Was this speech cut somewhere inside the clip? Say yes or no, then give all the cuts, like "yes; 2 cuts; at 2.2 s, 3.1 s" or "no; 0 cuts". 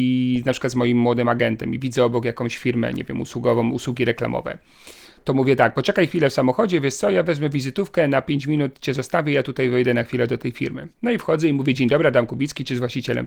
no; 0 cuts